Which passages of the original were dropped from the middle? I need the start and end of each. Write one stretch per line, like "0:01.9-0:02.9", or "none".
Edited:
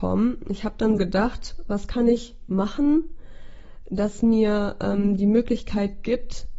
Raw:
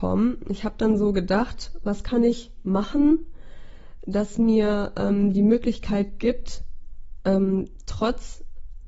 0:01.0-0:01.1

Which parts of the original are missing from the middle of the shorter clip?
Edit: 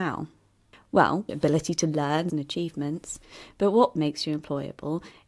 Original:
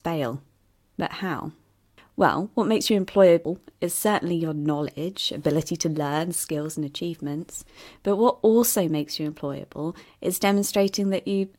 0:02.5-0:05.3
0:06.3-0:06.8
0:08.4-0:08.9

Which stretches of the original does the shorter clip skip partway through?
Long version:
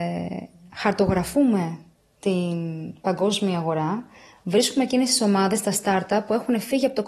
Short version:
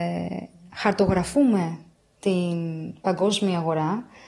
none

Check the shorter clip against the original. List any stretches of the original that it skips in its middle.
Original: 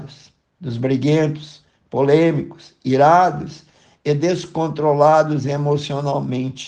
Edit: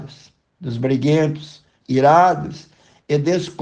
0:01.8-0:02.8

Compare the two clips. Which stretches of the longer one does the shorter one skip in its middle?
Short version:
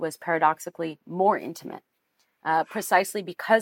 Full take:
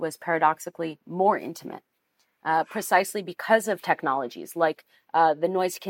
none

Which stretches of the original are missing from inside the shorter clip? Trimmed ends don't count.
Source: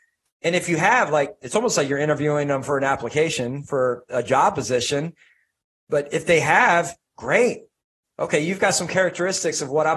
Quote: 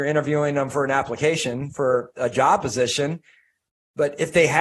none

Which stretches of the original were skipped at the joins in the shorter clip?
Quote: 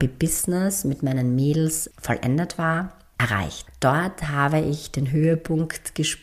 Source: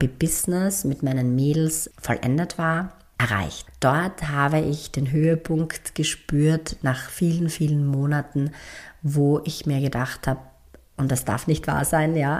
none

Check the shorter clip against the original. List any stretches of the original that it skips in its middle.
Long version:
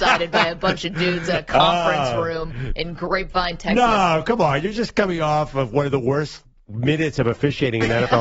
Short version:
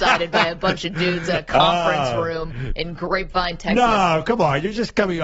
none

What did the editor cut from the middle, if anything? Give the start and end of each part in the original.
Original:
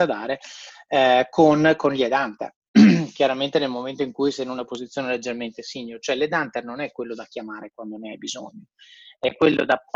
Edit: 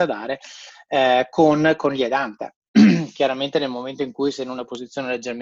none

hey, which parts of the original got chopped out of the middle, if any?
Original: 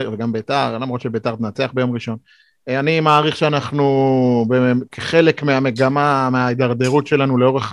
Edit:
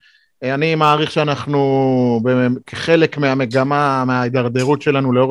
none

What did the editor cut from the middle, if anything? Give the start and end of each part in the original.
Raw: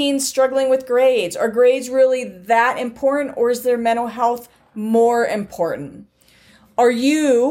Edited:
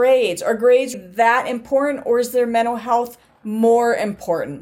0:01.9-0:02.2

